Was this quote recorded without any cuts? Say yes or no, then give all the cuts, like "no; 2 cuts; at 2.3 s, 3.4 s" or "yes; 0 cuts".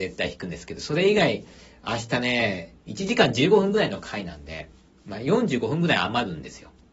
yes; 0 cuts